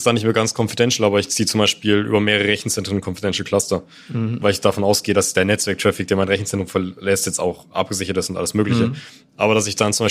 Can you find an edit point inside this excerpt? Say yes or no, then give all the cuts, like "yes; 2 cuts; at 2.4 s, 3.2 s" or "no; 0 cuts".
no; 0 cuts